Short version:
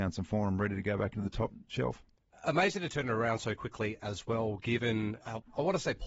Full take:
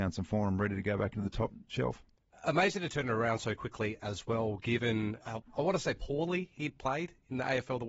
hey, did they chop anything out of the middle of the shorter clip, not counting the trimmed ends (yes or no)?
no